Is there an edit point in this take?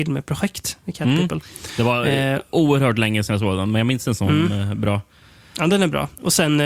no; 0 cuts

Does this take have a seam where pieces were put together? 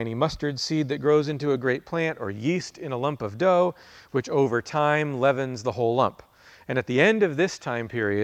no; 0 cuts

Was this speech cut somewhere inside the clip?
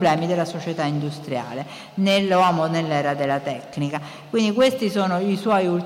no; 0 cuts

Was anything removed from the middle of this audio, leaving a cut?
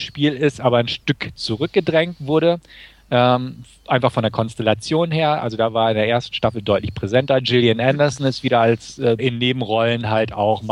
yes; 1 cut; at 9.2 s

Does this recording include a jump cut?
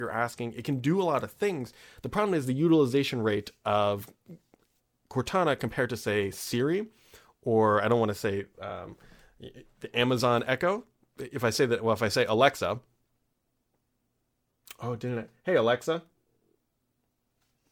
no; 0 cuts

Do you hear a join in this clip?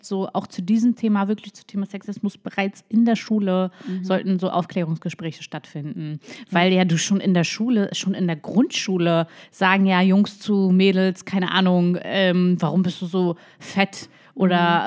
no; 0 cuts

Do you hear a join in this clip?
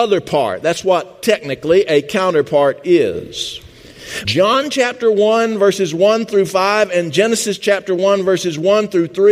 yes; 1 cut; at 4.3 s

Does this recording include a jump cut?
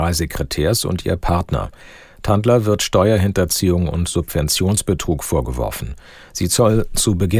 no; 0 cuts

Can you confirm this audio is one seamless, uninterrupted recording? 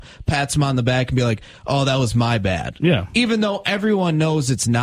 yes; 0 cuts

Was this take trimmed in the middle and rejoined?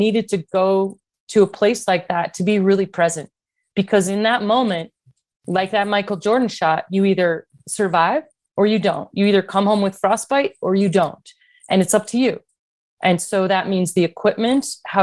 no; 0 cuts

